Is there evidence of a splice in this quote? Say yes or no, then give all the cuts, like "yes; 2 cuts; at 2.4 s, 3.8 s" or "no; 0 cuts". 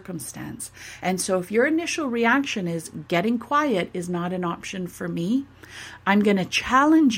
no; 0 cuts